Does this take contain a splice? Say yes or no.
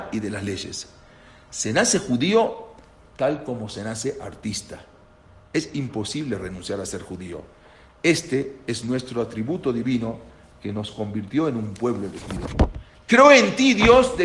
no